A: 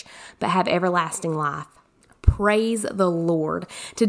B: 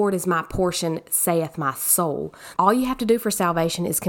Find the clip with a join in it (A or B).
B